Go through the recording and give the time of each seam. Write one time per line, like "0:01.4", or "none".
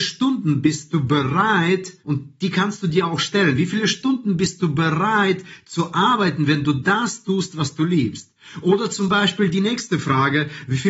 0:02.0